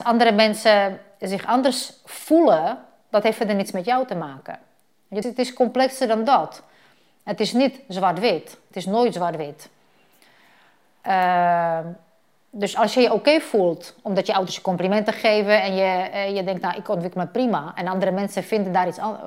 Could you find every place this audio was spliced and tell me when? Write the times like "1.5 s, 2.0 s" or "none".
5.2 s